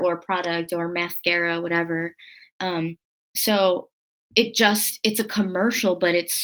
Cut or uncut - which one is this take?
uncut